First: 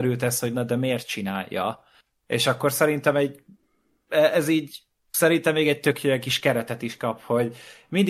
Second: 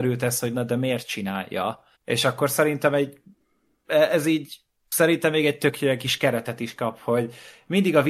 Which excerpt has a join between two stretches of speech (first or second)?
second